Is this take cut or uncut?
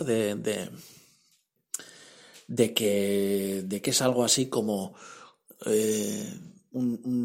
uncut